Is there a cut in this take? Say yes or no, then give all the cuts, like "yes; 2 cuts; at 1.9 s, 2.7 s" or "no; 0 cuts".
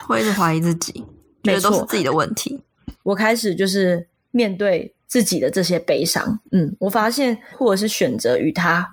yes; 2 cuts; at 3.0 s, 7.5 s